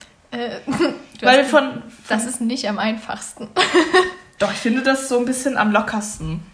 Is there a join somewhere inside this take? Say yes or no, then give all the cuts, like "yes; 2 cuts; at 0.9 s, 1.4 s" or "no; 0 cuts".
no; 0 cuts